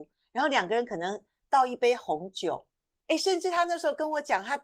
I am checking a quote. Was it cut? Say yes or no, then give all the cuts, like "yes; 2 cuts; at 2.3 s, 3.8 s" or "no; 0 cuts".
yes; 1 cut; at 3.1 s